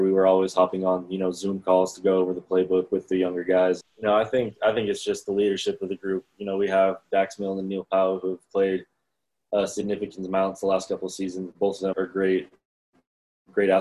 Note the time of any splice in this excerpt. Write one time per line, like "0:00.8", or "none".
0:03.8
0:11.9

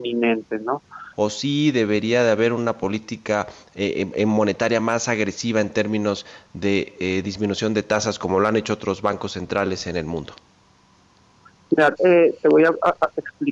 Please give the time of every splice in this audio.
0:01.1
0:12.0

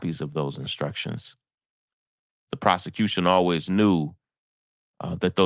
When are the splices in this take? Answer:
0:02.5

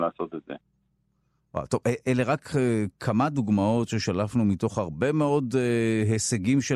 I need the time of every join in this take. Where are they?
none

